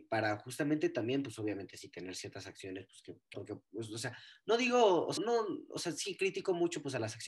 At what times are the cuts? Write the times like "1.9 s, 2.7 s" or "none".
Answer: 3.3 s, 5.2 s